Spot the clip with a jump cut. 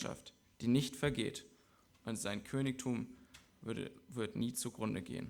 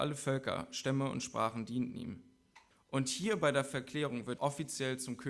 second; 2 cuts; at 2.7 s, 4.4 s

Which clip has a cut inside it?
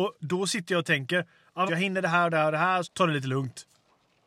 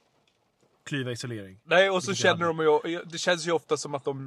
first; 2 cuts; at 1.7 s, 2.8 s

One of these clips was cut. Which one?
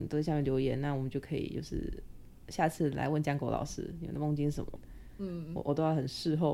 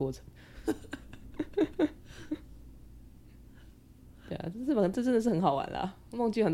first; 1 cut; at 4.8 s

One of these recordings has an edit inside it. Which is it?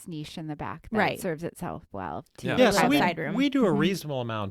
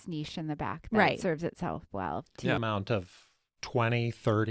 second; 1 cut; at 2.6 s

